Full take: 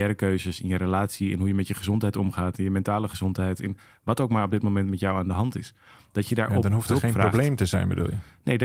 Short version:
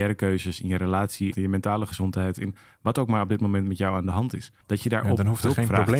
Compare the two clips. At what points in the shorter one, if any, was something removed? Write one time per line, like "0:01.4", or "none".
0:01.3
0:04.6